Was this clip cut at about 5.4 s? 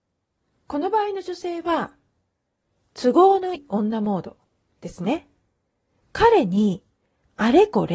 no; 1 cut; at 3.5 s

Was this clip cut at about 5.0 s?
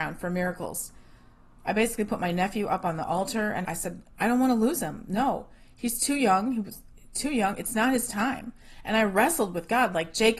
no; 2 cuts; at 1.6 s, 3.6 s

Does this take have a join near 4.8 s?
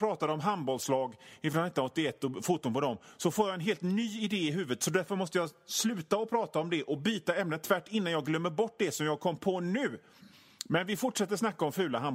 no; 0 cuts

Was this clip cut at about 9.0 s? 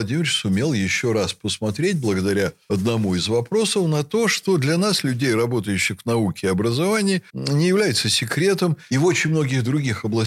no; 0 cuts

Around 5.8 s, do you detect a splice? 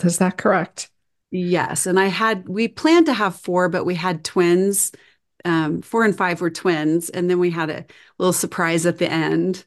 yes; 1 cut; at 5.8 s

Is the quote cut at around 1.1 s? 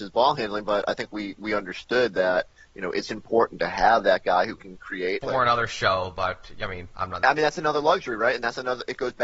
no; 2 cuts; at 5.2 s, 7.2 s

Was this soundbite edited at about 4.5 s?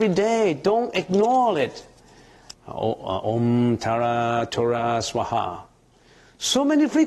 yes; 2 cuts; at 2.5 s, 4.5 s

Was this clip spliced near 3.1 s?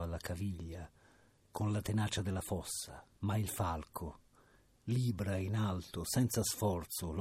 yes; 1 cut; at 3.1 s

